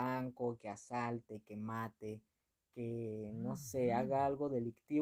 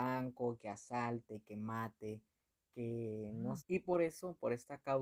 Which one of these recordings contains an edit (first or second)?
second